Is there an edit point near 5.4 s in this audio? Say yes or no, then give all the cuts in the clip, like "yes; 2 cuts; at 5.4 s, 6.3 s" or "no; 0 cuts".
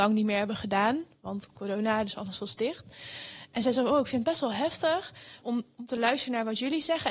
yes; 1 cut; at 5.4 s